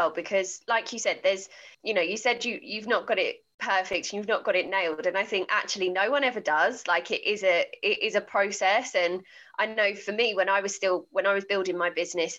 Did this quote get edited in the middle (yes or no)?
yes